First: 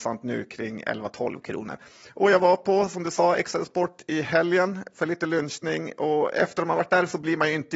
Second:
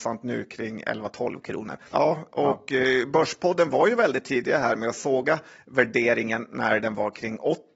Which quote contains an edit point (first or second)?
second